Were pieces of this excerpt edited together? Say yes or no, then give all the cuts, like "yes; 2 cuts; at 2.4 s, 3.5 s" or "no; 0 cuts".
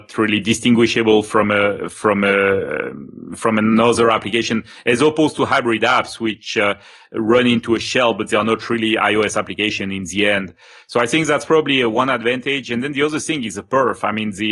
no; 0 cuts